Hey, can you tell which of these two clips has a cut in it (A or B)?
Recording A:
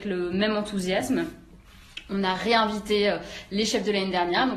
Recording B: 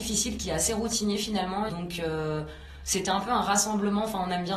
B